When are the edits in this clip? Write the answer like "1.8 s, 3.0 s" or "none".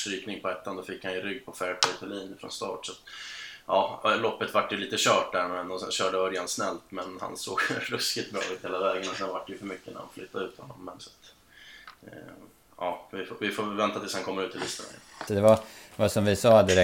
11.0 s, 15.3 s